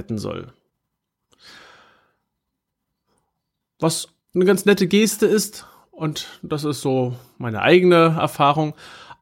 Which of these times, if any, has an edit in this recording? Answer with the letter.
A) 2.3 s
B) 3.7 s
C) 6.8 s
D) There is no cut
D